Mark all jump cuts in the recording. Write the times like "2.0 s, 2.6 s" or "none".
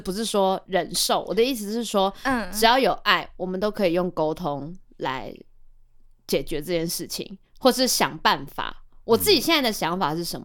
none